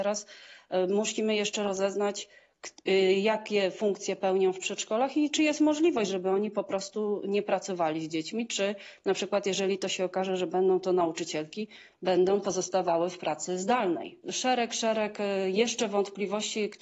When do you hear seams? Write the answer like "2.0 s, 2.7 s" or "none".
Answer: none